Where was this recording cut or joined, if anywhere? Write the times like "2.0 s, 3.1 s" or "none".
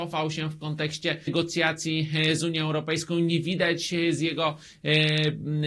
1.3 s